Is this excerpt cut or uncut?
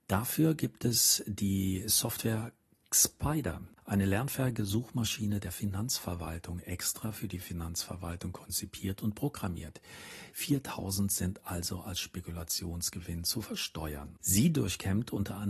cut